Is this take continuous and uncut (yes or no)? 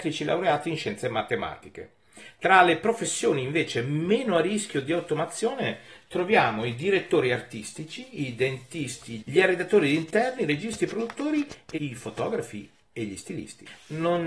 no